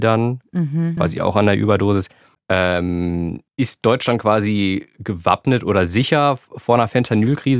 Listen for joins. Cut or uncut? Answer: cut